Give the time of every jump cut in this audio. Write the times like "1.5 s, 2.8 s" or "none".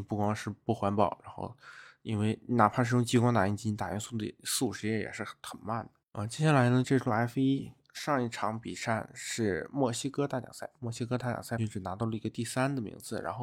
6.8 s, 11.6 s